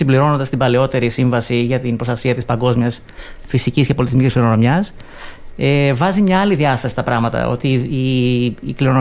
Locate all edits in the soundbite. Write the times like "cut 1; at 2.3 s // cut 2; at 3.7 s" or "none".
none